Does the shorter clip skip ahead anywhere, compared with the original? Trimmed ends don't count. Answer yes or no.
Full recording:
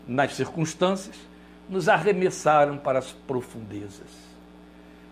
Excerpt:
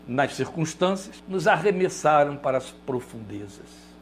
yes